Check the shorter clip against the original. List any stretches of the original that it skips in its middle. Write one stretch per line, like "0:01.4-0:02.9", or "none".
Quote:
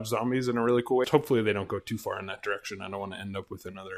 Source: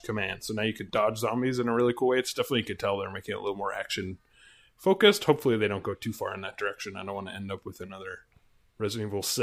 0:02.1-0:05.2